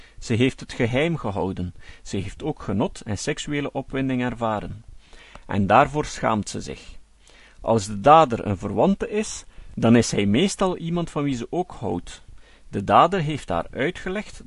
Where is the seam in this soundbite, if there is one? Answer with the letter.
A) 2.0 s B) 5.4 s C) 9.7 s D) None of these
A